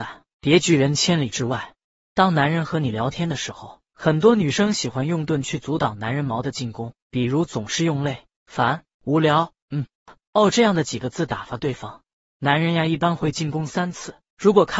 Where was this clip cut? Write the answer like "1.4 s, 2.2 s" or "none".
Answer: none

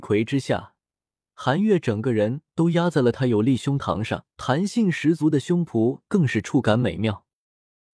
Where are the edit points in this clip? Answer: 1.1 s, 4.3 s

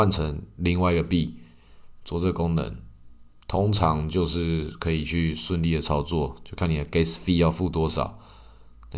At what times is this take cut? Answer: none

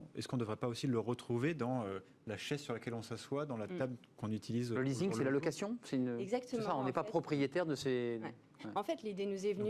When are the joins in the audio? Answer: none

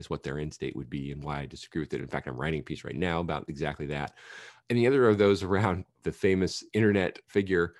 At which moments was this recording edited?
none

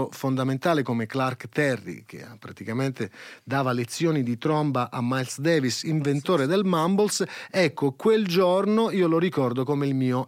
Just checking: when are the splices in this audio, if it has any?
none

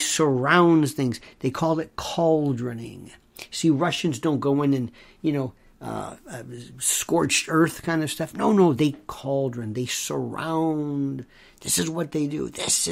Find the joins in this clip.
none

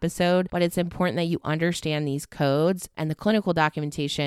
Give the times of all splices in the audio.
2.9 s

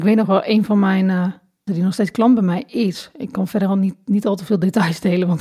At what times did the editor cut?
1.7 s

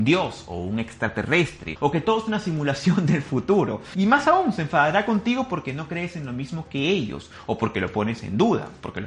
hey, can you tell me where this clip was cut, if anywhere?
none

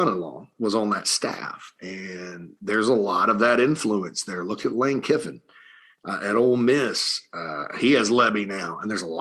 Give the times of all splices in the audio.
none

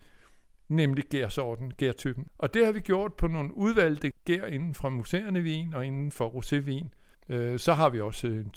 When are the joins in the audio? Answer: 7.1 s

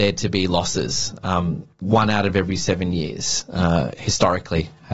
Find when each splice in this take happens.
1.7 s

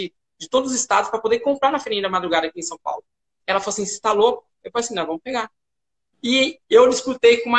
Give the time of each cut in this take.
3.2 s, 4.6 s

